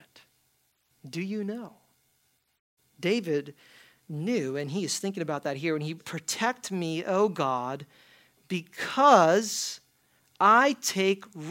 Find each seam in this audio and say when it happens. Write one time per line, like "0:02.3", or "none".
0:06.0